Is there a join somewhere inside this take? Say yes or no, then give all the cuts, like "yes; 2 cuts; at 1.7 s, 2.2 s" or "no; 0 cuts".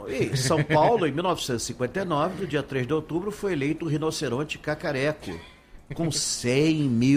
no; 0 cuts